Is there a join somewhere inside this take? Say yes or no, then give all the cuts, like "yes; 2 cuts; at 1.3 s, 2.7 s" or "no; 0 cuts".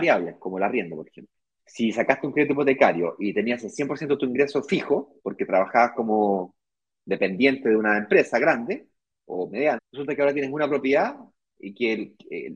yes; 2 cuts; at 1.6 s, 9.8 s